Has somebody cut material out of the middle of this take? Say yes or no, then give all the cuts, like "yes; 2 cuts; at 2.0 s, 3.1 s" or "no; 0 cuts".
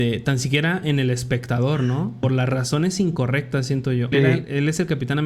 yes; 2 cuts; at 2.2 s, 4.1 s